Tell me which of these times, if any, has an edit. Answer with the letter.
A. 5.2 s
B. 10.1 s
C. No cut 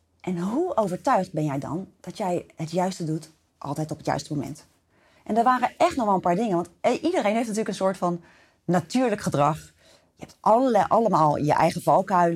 A